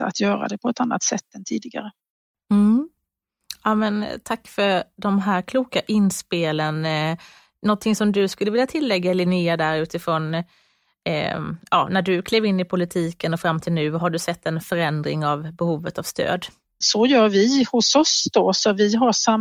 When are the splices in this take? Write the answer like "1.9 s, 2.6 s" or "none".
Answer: 16.8 s